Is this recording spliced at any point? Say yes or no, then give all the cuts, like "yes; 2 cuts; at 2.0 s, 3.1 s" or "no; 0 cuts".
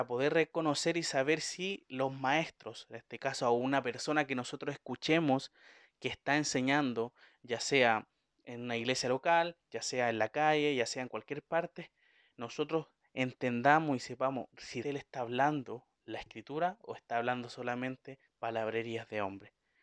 yes; 3 cuts; at 14.8 s, 15.9 s, 18.3 s